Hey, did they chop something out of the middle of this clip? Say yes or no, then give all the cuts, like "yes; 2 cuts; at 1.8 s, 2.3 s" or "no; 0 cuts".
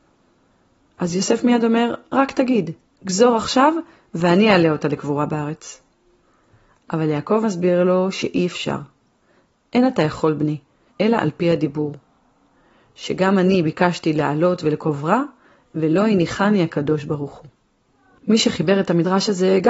yes; 1 cut; at 10.9 s